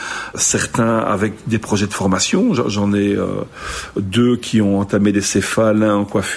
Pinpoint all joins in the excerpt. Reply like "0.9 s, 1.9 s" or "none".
none